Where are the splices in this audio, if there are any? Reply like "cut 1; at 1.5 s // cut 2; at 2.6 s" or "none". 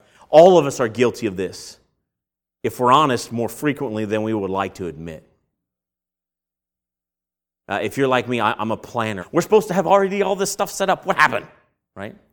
cut 1; at 9.2 s